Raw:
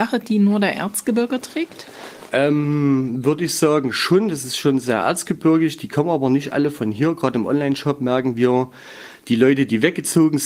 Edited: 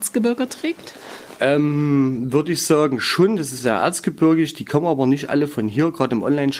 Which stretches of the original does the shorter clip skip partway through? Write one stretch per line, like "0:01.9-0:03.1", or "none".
0:04.5-0:04.8